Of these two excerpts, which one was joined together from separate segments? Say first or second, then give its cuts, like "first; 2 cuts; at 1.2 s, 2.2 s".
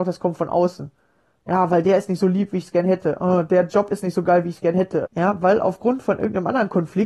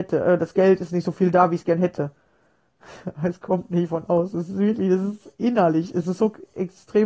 first; 1 cut; at 5.1 s